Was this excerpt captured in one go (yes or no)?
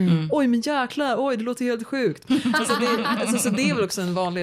no